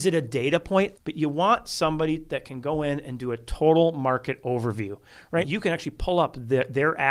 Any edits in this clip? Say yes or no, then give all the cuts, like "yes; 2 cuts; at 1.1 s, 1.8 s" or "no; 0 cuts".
yes; 2 cuts; at 1.0 s, 5.4 s